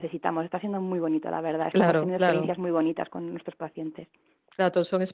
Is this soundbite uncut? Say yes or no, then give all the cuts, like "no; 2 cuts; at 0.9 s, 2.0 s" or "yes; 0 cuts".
yes; 0 cuts